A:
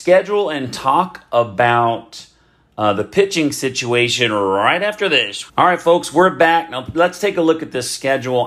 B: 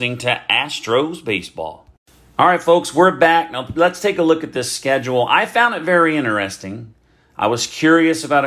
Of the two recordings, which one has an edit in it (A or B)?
A